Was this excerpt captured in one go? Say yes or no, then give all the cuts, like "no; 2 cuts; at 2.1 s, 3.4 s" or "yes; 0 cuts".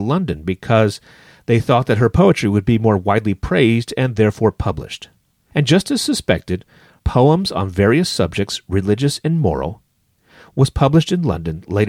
no; 2 cuts; at 5.5 s, 7.0 s